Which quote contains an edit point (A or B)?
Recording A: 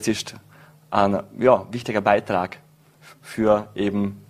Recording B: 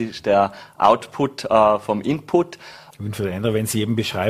B